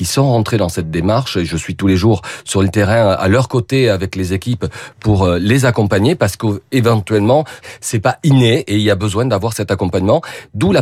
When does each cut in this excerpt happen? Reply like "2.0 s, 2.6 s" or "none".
7.6 s